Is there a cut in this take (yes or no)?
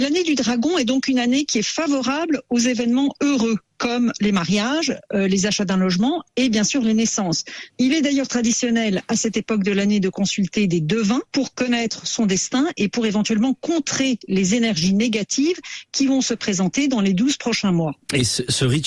yes